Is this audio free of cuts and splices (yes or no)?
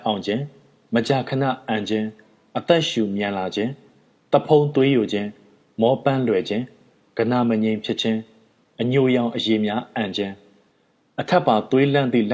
yes